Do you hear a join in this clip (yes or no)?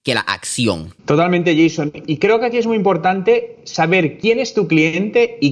yes